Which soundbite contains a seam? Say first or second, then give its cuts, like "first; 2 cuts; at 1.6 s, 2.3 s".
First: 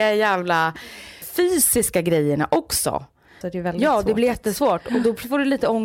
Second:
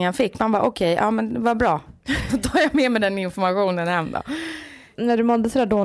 first; 2 cuts; at 1.2 s, 3.4 s